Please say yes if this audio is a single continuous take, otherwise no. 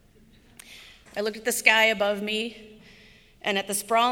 no